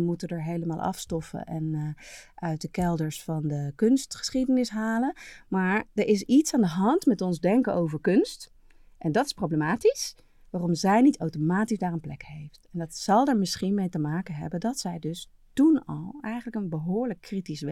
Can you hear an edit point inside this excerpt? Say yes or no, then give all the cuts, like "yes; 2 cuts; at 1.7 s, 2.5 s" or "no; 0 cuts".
no; 0 cuts